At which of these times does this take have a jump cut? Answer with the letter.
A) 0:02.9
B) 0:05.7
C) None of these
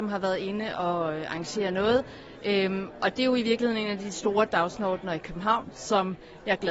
C